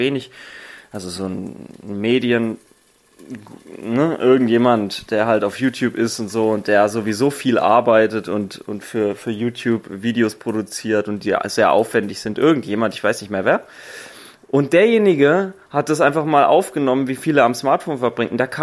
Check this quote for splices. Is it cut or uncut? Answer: uncut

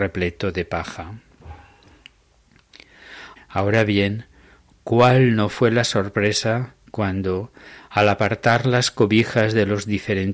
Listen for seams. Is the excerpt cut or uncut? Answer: cut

